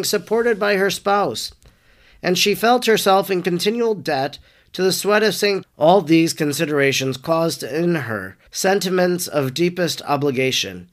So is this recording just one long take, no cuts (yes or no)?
no